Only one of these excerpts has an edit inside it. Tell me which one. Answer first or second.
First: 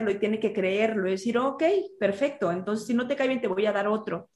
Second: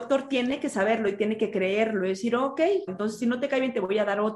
second